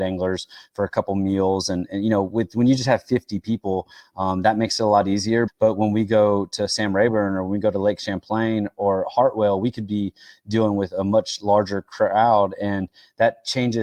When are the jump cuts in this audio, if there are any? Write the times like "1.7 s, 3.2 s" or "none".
5.5 s